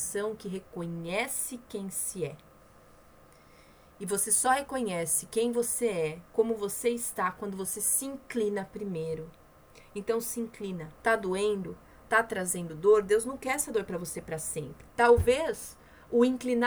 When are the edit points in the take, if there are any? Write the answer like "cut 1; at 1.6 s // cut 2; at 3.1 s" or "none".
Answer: cut 1; at 11.0 s // cut 2; at 14.9 s